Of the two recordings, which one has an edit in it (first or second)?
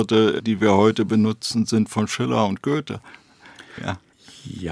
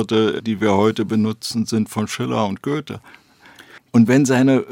second